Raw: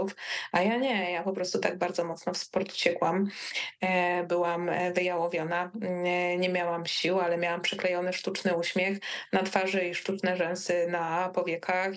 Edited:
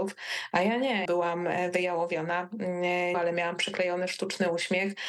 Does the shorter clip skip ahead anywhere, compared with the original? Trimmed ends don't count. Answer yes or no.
yes